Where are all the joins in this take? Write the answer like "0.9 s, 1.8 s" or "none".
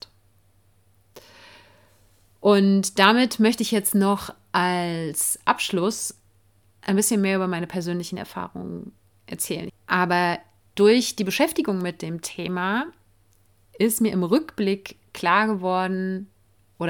9.7 s